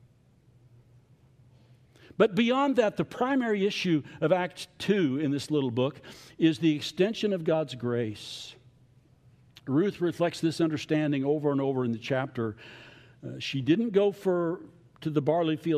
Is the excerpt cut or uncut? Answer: uncut